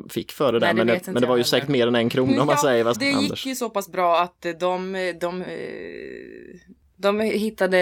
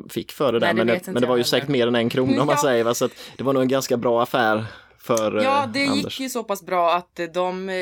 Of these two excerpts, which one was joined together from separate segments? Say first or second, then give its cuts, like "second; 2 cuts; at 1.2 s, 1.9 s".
first; 1 cut; at 2.9 s